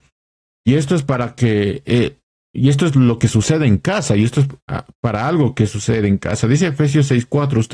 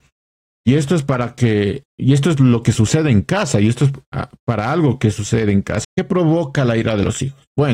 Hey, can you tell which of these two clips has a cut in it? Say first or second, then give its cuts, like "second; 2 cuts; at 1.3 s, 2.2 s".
second; 2 cuts; at 1.8 s, 5.8 s